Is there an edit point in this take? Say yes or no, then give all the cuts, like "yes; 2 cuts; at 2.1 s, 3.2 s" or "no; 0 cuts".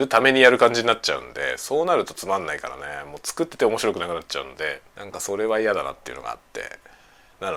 yes; 2 cuts; at 3.5 s, 4.9 s